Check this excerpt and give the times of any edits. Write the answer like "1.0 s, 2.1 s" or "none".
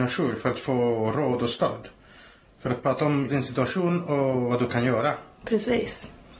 3.3 s